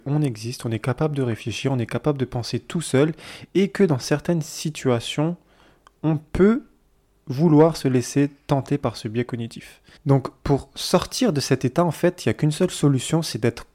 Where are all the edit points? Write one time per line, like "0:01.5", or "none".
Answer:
0:10.0